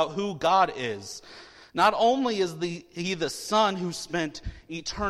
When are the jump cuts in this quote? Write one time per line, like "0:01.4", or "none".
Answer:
none